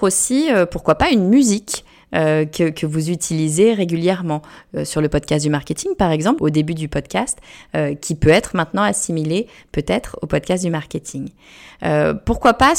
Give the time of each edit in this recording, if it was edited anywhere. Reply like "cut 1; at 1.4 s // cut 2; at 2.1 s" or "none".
cut 1; at 6.4 s